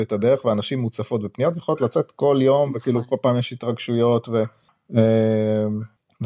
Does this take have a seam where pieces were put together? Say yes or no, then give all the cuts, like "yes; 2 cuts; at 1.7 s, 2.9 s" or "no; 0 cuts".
no; 0 cuts